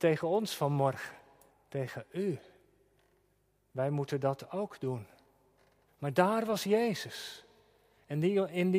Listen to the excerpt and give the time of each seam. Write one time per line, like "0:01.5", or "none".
0:01.5
0:05.9